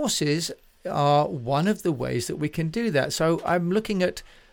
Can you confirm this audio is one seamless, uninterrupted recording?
yes; 0 cuts

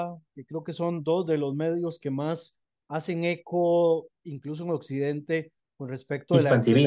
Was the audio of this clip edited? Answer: no; 0 cuts

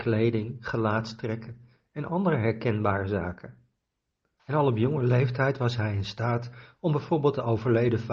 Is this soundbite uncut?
no; 1 cut; at 4.4 s

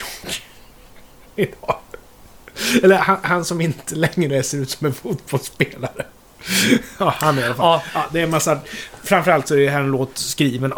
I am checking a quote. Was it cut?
no; 0 cuts

